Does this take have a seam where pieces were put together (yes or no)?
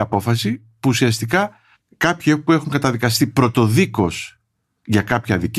no